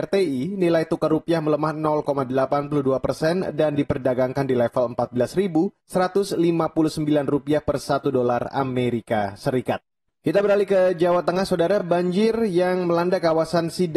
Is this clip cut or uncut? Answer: uncut